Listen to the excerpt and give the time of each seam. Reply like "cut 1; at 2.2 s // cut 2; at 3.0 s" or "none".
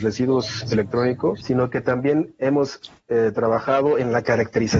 none